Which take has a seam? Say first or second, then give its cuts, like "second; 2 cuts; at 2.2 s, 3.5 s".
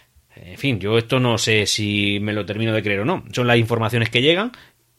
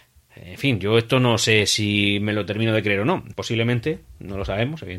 second; 1 cut; at 3.3 s